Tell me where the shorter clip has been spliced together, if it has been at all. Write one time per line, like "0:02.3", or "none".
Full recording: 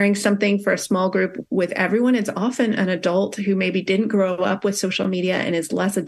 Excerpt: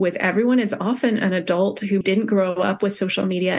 0:02.0